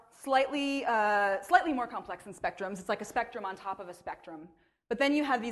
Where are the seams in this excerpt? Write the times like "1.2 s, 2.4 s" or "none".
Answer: none